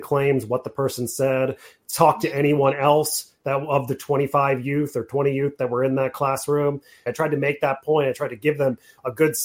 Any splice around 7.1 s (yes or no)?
yes